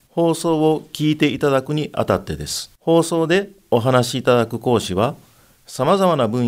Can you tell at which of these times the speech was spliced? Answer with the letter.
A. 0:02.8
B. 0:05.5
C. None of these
A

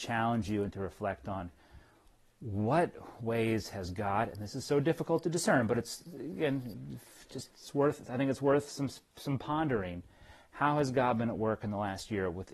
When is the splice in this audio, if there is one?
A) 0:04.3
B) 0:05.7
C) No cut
C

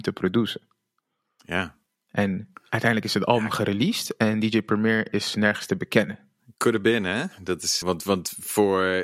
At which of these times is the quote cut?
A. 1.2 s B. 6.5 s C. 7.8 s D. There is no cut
C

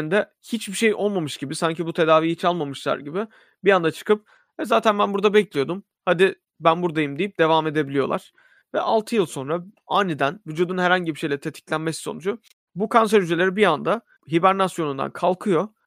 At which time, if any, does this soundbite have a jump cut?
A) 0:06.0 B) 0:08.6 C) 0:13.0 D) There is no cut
B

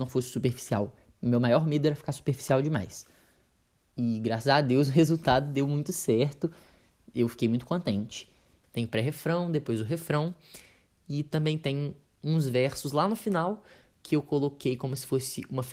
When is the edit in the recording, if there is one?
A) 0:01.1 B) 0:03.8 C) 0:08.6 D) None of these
C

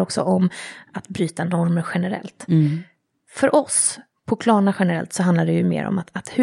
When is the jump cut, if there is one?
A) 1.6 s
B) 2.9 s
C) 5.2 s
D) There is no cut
D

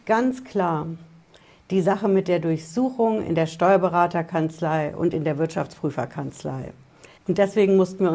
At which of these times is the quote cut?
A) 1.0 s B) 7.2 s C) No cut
B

